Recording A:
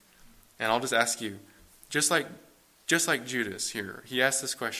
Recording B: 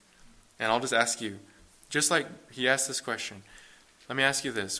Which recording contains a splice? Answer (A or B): B